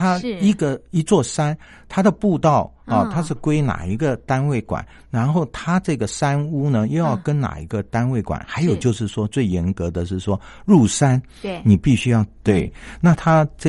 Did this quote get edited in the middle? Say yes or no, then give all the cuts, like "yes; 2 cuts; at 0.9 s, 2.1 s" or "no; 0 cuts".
yes; 1 cut; at 12.4 s